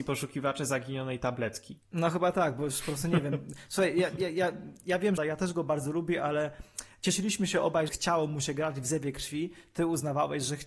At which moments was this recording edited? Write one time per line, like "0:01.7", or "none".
0:01.9
0:05.2
0:07.9